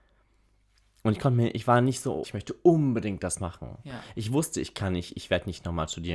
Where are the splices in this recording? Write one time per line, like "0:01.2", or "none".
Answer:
0:02.2